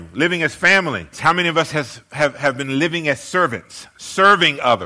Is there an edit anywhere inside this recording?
yes; 1 cut; at 1.1 s

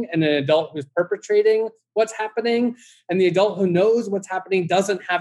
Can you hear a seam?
no; 0 cuts

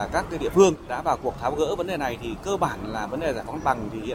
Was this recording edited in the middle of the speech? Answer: no; 0 cuts

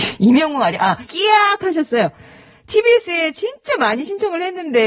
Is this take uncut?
no; 1 cut; at 1.1 s

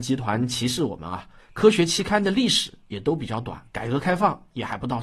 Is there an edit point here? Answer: yes; 2 cuts; at 1.4 s, 3.7 s

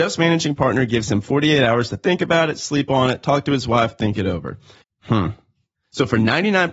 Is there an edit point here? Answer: yes; 1 cut; at 4.8 s

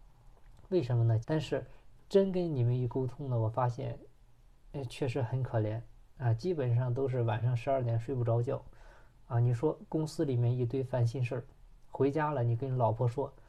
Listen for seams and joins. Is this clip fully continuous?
no; 1 cut; at 1.2 s

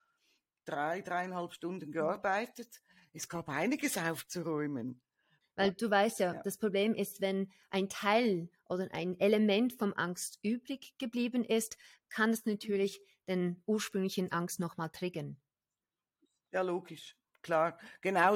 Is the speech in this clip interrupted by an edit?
yes; 1 cut; at 5.4 s

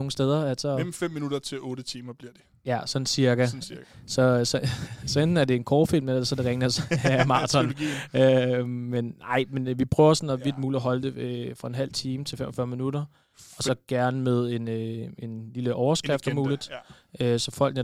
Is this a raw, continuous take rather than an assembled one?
yes; 0 cuts

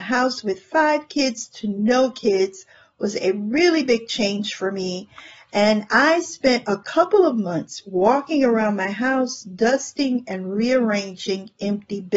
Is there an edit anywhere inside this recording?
no; 0 cuts

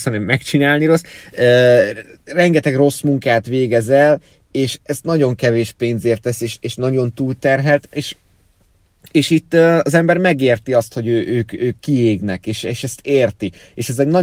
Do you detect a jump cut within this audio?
no; 0 cuts

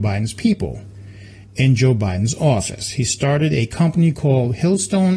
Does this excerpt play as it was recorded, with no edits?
yes; 0 cuts

